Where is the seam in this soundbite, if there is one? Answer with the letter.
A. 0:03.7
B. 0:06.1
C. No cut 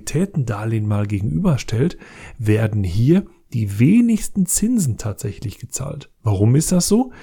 C